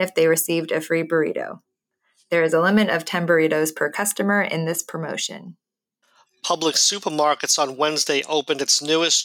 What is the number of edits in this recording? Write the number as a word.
zero